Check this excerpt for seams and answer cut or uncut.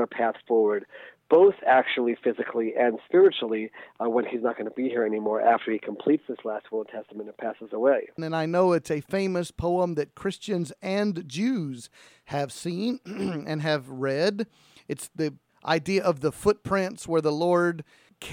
cut